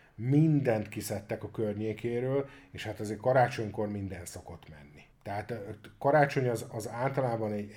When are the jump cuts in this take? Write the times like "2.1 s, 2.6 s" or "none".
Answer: 5.1 s